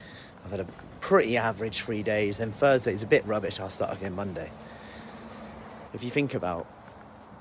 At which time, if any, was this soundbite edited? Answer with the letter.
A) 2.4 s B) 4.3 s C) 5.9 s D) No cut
C